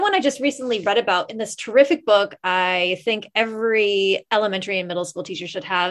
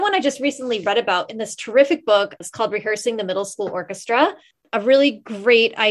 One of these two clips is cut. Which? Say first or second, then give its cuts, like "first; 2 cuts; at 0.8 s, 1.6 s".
second; 1 cut; at 2.4 s